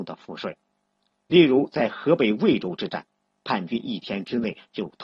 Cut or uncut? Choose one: cut